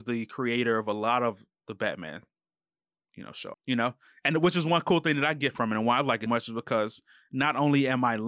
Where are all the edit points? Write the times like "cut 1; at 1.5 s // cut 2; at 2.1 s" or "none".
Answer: cut 1; at 3.5 s // cut 2; at 6.3 s